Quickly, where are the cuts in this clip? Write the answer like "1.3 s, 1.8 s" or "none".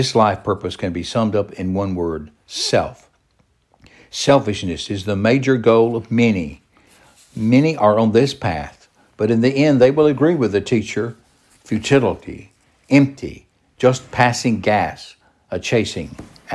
none